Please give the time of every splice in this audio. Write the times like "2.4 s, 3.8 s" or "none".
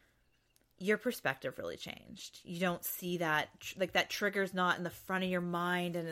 none